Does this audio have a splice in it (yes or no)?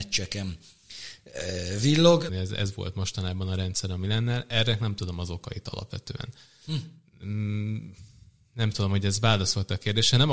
yes